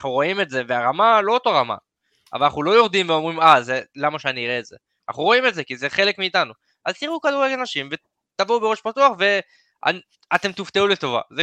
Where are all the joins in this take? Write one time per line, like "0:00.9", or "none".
none